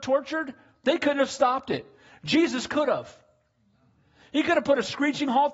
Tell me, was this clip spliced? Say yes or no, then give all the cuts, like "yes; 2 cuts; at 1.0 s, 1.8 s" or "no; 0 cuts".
no; 0 cuts